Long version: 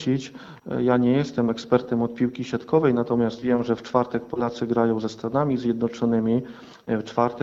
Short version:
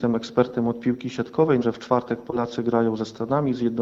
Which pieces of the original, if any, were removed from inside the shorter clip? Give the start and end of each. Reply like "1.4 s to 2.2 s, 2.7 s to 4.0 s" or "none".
3.0 s to 3.6 s